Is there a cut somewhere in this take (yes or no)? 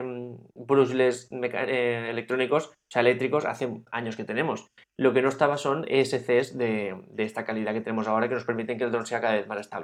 yes